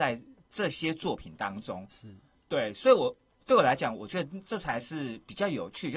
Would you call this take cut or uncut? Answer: uncut